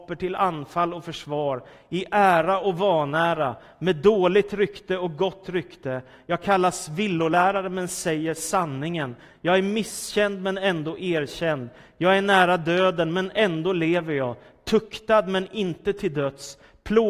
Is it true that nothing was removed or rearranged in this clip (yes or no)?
yes